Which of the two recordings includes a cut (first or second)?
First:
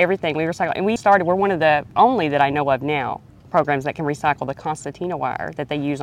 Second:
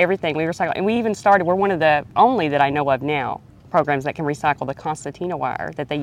first